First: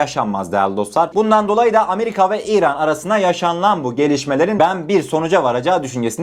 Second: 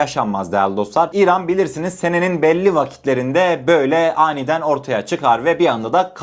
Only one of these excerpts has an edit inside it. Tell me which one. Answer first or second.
first